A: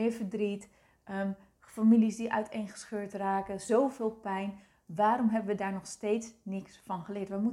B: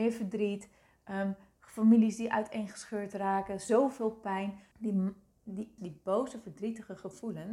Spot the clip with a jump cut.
B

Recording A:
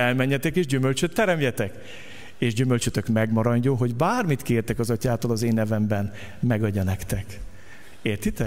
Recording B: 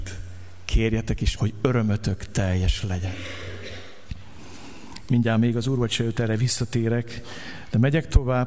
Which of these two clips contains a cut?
B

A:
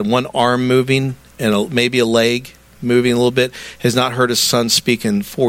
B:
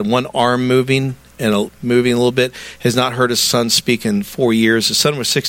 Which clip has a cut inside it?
B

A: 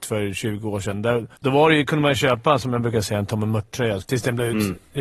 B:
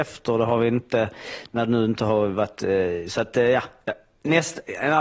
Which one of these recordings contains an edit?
A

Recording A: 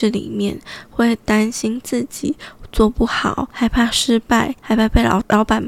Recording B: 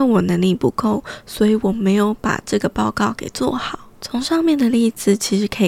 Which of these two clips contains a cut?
B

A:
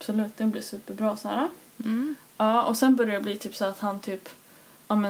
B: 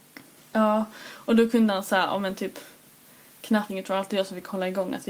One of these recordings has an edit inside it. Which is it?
B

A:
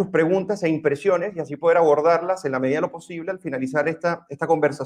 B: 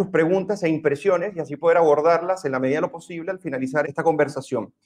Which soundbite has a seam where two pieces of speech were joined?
B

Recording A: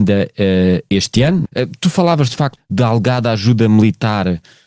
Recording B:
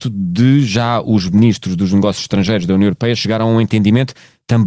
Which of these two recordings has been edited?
A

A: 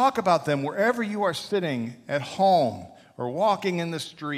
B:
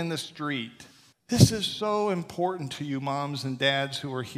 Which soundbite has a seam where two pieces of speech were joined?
B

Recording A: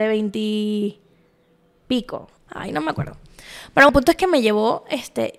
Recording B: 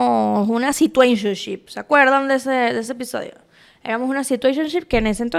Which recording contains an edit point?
A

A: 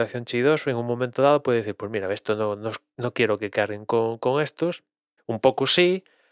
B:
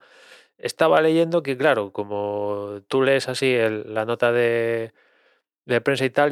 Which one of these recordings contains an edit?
A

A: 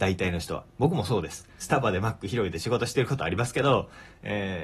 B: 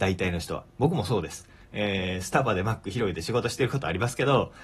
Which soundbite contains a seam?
A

